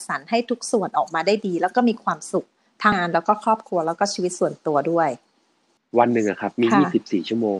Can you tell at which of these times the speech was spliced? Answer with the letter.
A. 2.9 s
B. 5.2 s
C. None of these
A